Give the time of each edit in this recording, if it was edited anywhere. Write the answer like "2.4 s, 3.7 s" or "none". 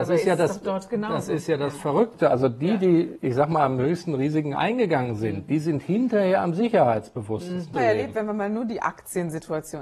7.7 s